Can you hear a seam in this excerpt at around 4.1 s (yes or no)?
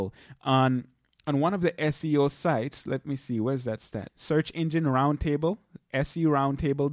yes